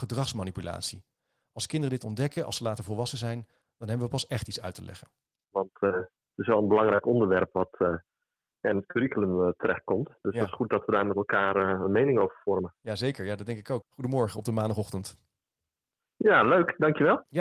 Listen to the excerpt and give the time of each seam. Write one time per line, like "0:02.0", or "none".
0:05.5
0:13.8